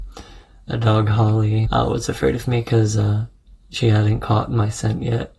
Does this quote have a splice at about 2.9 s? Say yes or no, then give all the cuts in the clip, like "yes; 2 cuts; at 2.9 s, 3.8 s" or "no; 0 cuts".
no; 1 cut; at 1.7 s